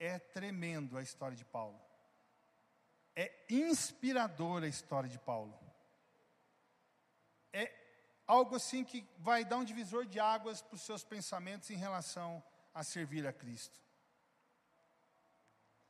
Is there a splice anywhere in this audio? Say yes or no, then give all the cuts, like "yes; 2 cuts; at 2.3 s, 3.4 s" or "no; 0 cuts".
no; 0 cuts